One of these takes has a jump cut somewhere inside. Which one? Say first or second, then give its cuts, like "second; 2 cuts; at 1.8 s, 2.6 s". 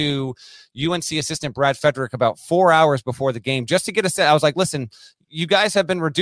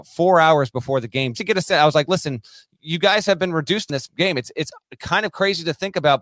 second; 1 cut; at 1.3 s